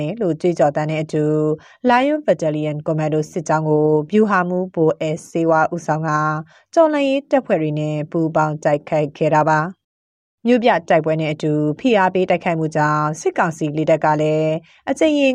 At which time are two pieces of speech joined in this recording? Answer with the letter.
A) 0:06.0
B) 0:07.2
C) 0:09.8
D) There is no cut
D